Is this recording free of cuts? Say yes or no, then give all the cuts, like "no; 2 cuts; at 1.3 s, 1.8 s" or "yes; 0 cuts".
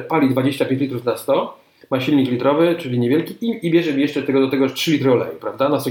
yes; 0 cuts